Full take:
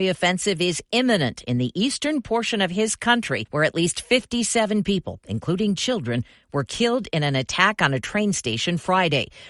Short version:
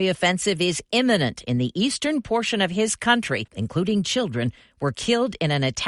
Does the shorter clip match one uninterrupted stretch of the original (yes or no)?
no